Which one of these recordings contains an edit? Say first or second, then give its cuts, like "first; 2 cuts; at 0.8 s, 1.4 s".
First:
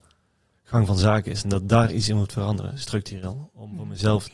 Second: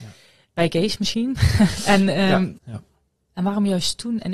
second; 1 cut; at 2.6 s